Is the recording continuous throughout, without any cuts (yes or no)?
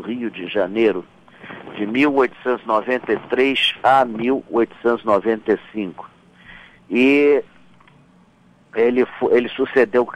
yes